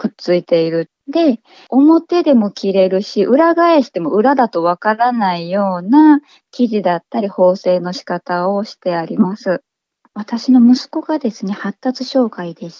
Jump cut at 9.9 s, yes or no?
no